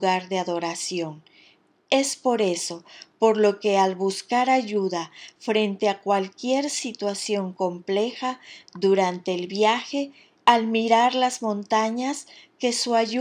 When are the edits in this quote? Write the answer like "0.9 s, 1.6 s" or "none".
10.4 s